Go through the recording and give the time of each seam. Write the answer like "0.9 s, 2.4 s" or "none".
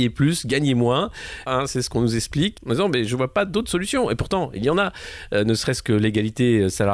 1.5 s, 2.6 s